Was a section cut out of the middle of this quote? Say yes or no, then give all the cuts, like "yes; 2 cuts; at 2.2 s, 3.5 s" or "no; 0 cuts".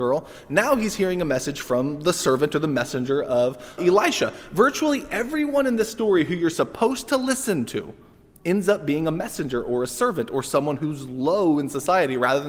yes; 1 cut; at 3.8 s